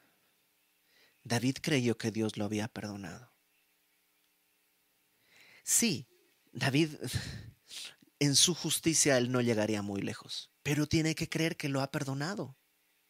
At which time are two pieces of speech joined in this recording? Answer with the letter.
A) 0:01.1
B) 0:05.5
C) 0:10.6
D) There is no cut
C